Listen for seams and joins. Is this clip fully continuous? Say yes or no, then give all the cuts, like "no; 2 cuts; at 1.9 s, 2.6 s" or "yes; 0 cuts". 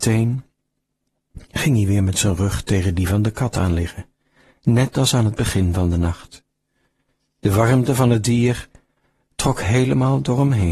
yes; 0 cuts